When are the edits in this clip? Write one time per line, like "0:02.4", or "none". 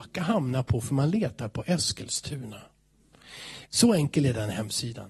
0:03.7

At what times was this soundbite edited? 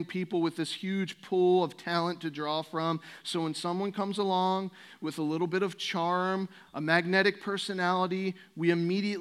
0:06.7

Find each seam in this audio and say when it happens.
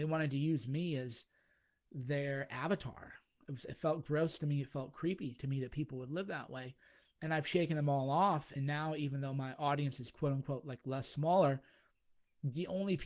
none

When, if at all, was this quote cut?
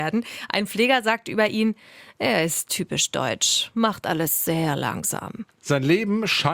none

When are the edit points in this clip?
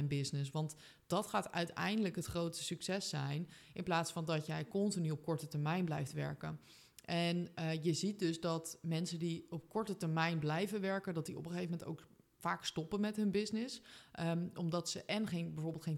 none

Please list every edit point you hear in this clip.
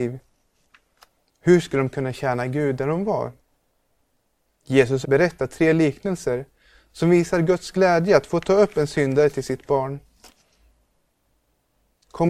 0:05.0

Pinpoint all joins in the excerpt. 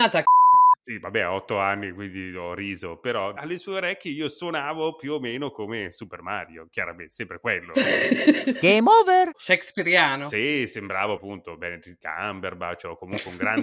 0:09.3
0:11.2

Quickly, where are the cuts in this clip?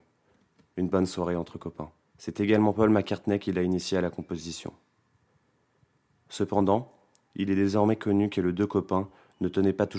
0:02.1

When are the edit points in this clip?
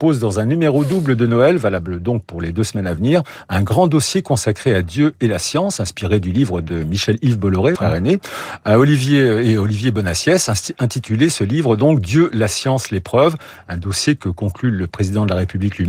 0:07.7

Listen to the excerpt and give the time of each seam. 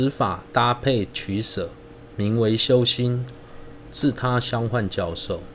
0:03.9

